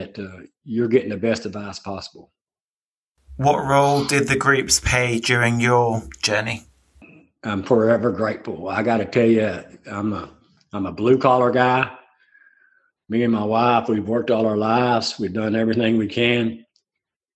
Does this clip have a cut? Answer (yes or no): no